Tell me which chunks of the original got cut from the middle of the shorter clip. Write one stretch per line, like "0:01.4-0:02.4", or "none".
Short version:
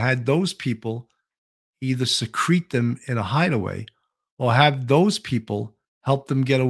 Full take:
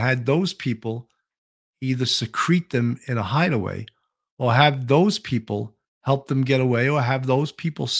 none